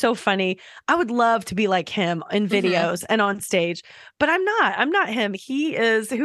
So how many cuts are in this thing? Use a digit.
0